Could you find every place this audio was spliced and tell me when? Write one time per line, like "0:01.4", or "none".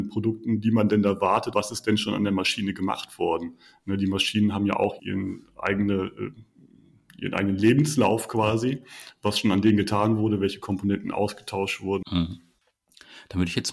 0:01.5
0:05.0
0:12.0